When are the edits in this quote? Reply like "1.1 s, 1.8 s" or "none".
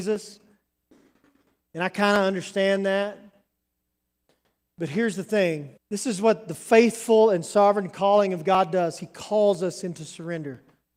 5.8 s